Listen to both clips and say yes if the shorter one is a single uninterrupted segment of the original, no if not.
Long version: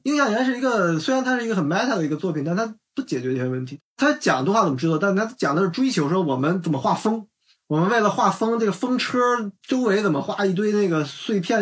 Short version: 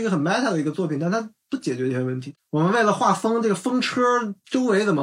no